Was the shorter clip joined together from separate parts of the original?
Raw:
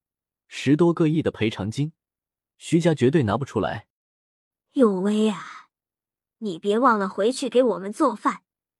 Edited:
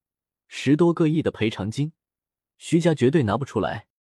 no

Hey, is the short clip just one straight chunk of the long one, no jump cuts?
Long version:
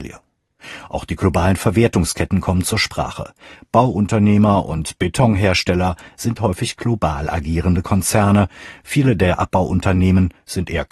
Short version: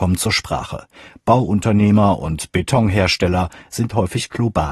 yes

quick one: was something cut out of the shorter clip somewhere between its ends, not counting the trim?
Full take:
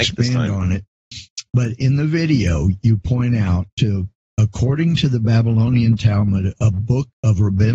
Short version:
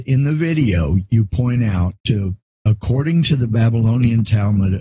no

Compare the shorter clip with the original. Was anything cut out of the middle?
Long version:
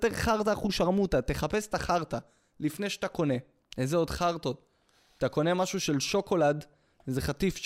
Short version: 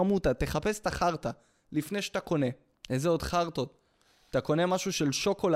no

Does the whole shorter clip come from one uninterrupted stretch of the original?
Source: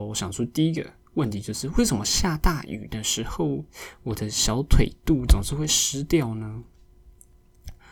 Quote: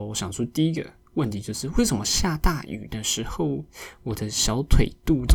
yes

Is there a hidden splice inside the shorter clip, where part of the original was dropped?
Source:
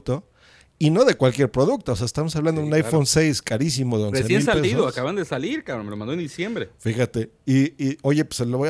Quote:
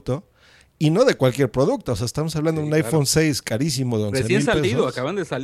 no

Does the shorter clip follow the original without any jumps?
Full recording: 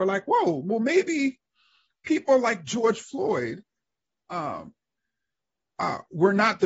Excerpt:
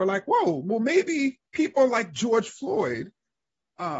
no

